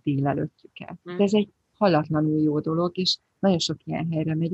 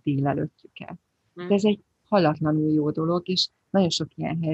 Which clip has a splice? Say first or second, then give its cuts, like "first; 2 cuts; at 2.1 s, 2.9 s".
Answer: first; 1 cut; at 1.0 s